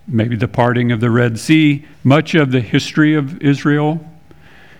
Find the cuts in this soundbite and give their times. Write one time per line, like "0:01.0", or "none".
0:01.9